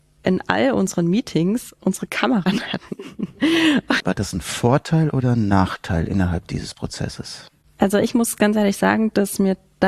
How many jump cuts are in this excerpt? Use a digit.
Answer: 2